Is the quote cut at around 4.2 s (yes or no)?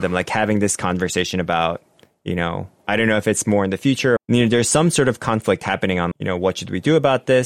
yes